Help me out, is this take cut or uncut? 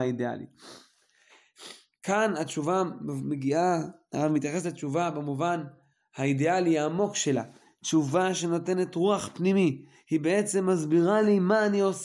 uncut